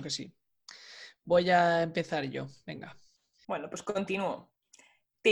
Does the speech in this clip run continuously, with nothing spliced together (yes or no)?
no